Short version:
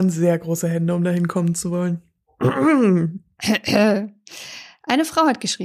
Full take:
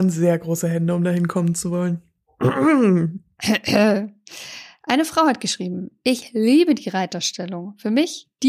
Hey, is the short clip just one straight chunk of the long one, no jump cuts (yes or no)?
yes